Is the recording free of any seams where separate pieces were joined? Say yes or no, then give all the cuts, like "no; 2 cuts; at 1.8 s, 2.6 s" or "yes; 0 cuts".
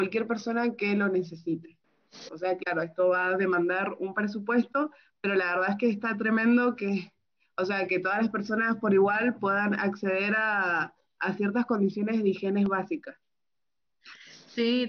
no; 1 cut; at 2.3 s